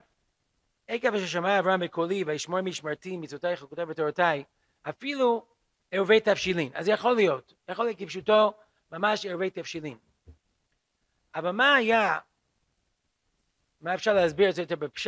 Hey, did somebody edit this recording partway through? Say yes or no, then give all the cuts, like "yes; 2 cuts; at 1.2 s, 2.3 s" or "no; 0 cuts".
no; 0 cuts